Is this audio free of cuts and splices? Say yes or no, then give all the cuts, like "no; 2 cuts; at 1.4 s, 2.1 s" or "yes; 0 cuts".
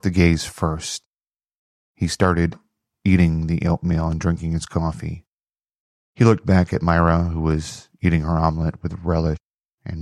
yes; 0 cuts